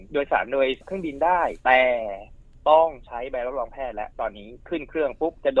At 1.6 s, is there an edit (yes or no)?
yes